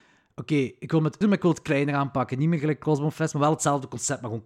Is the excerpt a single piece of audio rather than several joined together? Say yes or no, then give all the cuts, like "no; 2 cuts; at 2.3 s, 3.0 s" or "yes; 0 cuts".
no; 1 cut; at 1.2 s